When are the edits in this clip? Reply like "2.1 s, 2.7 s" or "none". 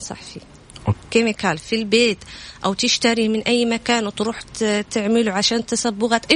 0.9 s